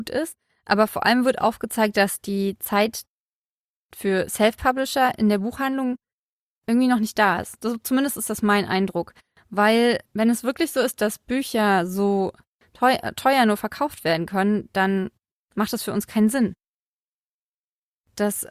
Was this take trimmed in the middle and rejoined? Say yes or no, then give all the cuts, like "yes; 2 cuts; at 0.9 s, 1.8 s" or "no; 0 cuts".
no; 0 cuts